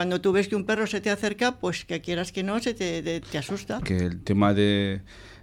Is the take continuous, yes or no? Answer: no